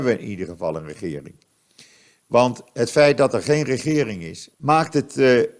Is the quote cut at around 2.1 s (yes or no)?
no